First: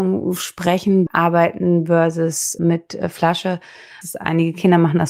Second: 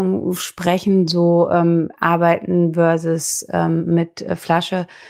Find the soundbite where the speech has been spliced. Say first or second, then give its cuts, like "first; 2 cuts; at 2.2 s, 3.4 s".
first; 3 cuts; at 1.1 s, 2.6 s, 4.0 s